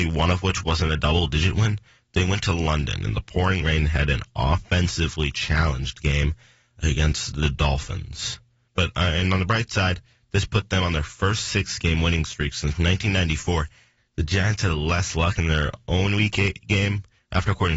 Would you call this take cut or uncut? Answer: cut